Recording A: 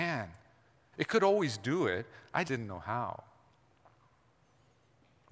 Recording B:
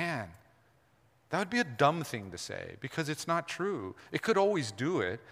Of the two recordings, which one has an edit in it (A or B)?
A